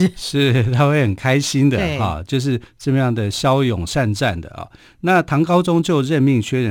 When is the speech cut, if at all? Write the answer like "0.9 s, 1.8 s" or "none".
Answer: none